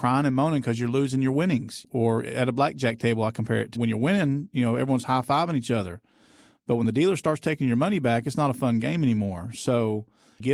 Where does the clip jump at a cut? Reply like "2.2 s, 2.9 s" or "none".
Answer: 3.8 s

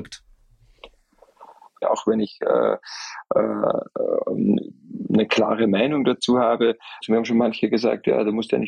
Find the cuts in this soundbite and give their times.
1.8 s, 7.0 s

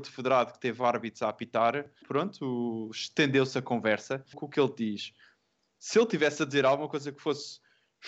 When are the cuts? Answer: 2.0 s, 4.3 s

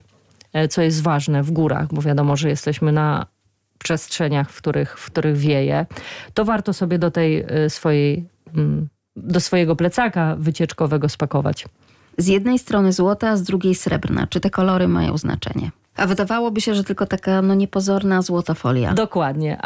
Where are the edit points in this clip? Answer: 15.9 s

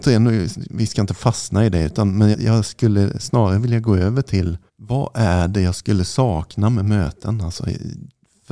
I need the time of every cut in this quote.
2.3 s, 4.7 s

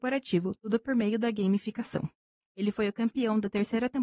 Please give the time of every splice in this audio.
2.4 s

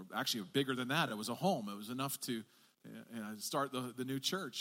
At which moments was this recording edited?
none

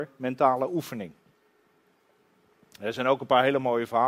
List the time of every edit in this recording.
none

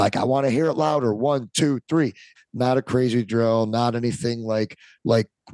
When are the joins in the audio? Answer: 2.4 s

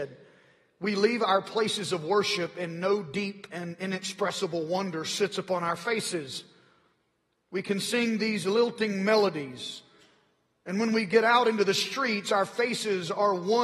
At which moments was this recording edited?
none

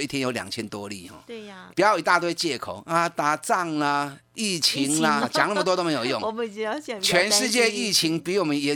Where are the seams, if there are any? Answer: 1.7 s, 5.2 s

